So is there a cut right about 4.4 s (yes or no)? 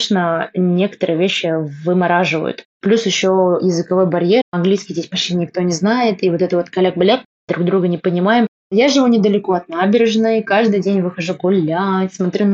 yes